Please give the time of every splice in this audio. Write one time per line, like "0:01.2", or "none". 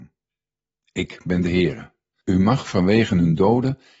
0:02.1

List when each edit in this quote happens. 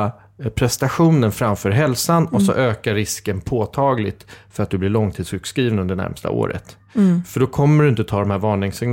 none

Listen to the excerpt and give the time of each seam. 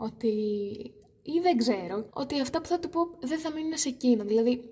0:02.1

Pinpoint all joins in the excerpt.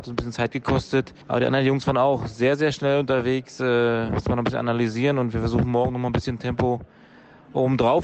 0:01.2

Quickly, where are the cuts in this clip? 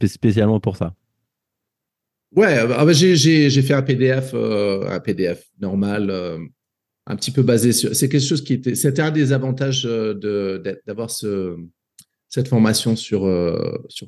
none

